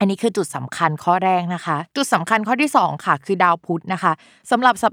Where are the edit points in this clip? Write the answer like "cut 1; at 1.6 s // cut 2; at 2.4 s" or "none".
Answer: cut 1; at 1.9 s